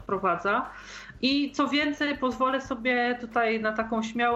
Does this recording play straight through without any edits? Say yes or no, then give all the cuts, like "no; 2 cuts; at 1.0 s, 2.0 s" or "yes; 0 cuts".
yes; 0 cuts